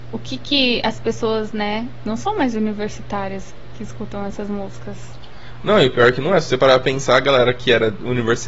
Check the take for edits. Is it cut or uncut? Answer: uncut